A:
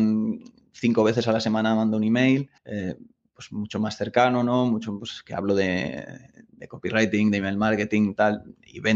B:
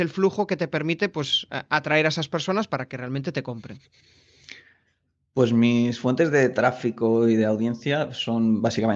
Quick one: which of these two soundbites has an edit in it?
A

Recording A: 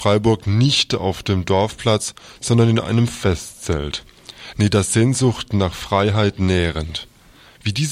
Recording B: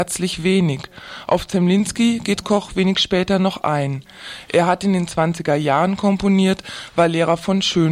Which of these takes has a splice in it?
A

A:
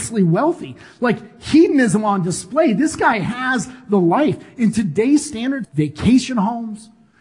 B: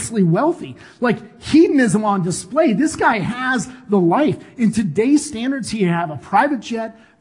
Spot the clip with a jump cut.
A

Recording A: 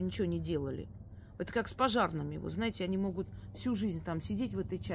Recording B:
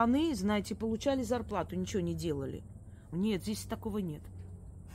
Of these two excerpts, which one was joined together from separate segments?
B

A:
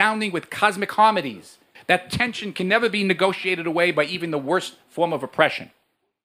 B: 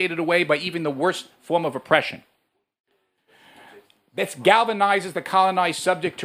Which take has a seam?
A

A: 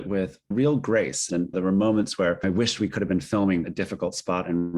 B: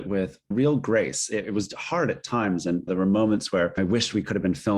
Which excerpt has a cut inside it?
A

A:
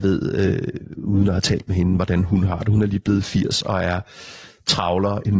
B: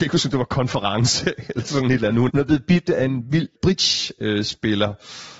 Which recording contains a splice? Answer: B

